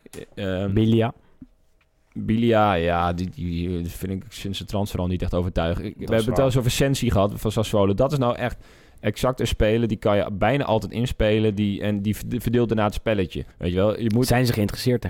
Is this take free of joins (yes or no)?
no